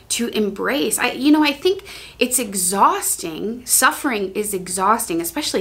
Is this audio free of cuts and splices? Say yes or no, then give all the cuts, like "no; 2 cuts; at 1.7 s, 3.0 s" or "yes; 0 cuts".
yes; 0 cuts